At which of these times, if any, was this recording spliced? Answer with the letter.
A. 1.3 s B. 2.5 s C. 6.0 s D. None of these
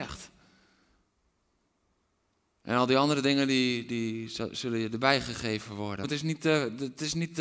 C